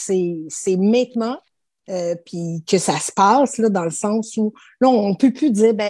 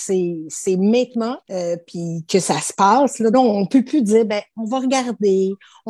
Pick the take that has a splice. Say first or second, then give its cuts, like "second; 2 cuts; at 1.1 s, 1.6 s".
second; 2 cuts; at 1.4 s, 3.3 s